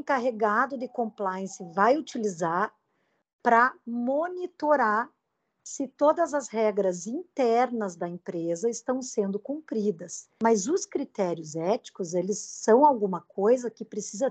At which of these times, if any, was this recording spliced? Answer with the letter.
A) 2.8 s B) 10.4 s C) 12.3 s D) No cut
B